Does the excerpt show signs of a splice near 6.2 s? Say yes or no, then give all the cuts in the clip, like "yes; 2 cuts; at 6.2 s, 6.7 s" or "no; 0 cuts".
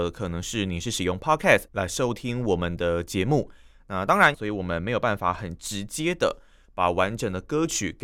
no; 2 cuts; at 1.7 s, 4.3 s